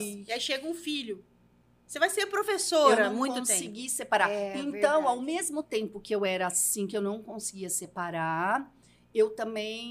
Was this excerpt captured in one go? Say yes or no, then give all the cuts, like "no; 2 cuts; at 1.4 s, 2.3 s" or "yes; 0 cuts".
yes; 0 cuts